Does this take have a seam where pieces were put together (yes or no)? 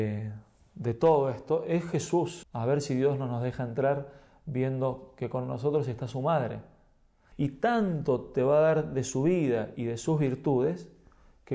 yes